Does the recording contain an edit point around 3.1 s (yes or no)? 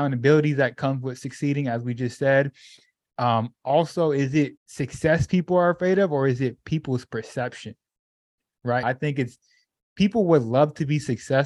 no